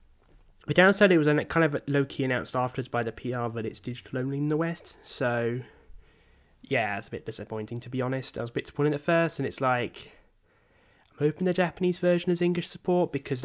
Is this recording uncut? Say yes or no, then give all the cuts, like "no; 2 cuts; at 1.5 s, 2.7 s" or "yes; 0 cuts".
yes; 0 cuts